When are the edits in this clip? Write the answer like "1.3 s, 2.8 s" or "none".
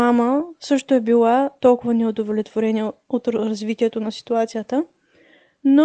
none